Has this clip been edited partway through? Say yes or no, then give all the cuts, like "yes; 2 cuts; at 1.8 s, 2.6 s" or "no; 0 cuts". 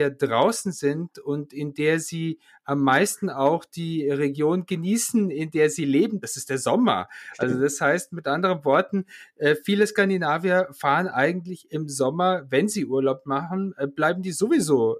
no; 0 cuts